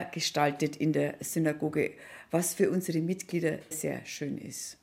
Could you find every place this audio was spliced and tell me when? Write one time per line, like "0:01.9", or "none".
0:03.7

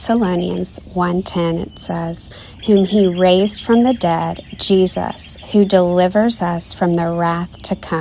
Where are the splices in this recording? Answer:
0:02.6

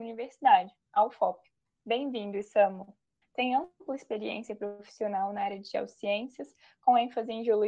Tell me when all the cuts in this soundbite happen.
0:03.2

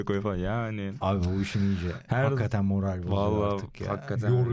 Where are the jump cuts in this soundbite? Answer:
none

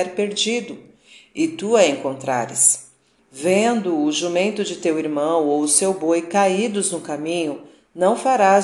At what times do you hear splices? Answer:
0:03.2

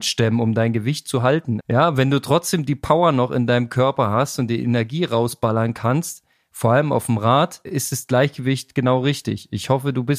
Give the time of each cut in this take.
0:01.6
0:07.6

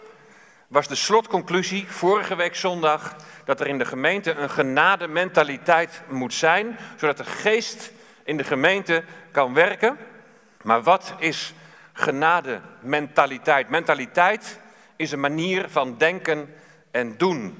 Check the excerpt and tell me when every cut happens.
0:10.6

